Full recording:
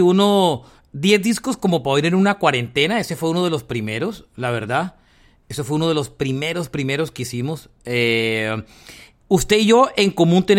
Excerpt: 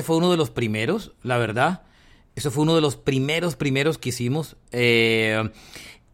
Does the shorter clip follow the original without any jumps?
yes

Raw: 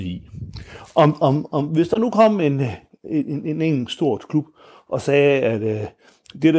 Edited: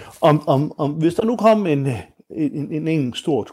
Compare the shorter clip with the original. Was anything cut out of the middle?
no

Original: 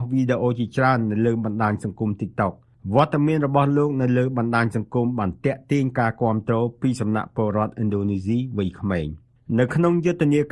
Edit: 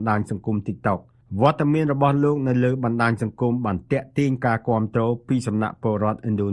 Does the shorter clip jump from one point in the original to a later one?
no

